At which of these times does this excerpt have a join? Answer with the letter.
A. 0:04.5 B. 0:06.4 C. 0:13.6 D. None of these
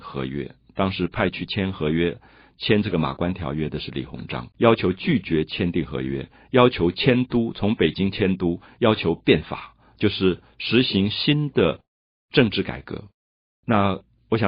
A